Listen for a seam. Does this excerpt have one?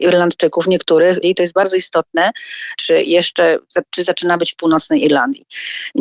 yes; 2 cuts; at 1.2 s, 2.8 s

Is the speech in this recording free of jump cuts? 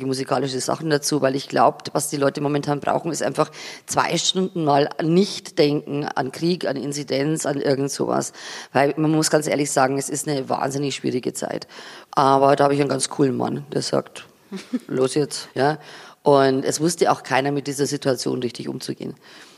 no; 2 cuts; at 12.1 s, 15.5 s

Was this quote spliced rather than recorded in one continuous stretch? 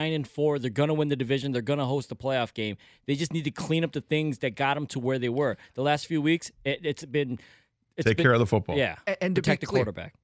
no; 0 cuts

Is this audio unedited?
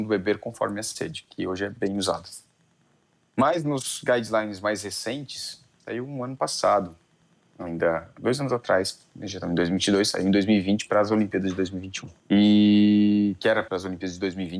no; 2 cuts; at 12.2 s, 13.7 s

